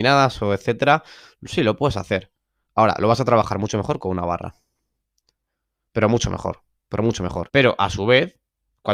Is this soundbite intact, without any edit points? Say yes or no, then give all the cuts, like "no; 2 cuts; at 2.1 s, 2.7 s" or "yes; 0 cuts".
no; 1 cut; at 7.5 s